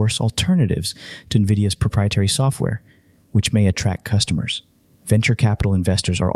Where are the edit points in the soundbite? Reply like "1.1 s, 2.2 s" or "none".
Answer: none